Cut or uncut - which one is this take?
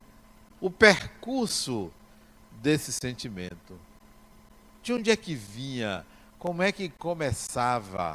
uncut